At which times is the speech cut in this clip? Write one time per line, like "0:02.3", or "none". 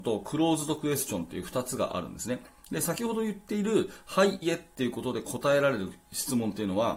0:04.4